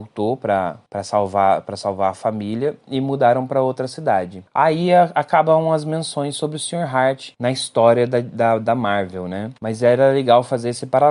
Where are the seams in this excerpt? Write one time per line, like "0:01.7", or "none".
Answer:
none